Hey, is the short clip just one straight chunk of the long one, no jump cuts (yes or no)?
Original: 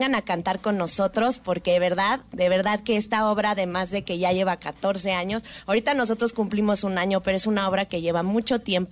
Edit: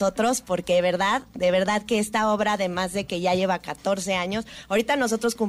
yes